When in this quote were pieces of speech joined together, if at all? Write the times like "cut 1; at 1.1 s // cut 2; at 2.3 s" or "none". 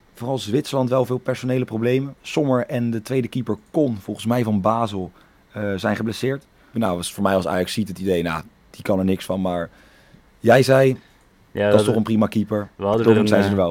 cut 1; at 6.7 s